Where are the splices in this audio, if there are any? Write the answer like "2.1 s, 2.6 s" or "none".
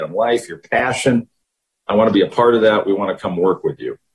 none